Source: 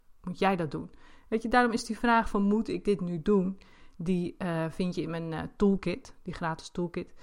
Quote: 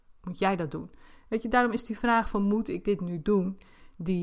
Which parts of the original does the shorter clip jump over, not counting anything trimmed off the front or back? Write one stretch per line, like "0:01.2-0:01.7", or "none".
none